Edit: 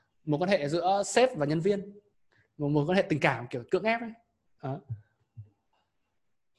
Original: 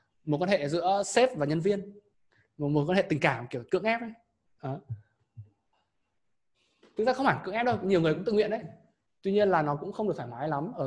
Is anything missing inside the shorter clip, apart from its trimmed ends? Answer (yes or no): no